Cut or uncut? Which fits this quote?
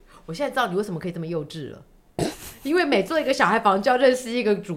uncut